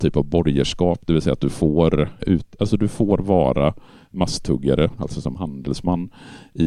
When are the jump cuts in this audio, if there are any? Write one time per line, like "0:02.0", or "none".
0:02.2
0:05.0